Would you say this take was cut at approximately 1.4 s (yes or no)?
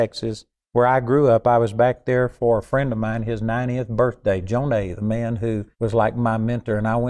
no